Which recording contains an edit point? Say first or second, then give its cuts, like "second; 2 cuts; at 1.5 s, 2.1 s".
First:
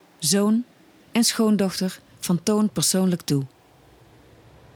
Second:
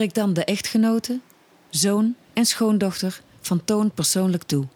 second; 1 cut; at 2.2 s